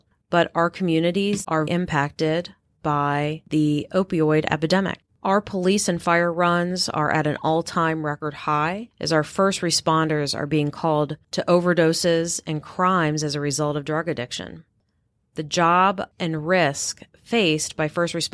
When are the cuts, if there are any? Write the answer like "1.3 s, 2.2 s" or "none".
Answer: 1.7 s